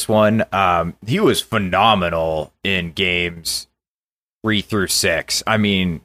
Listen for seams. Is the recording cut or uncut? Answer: uncut